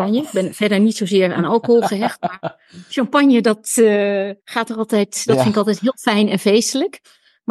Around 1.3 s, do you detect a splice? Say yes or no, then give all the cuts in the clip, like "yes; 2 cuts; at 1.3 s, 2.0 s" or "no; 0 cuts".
no; 1 cut; at 4.4 s